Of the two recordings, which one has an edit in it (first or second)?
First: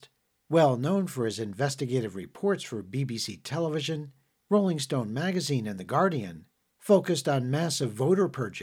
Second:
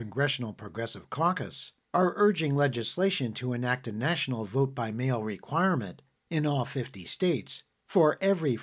second